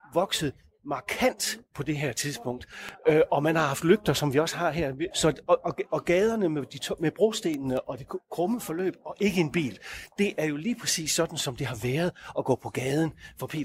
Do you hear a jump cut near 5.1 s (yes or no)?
yes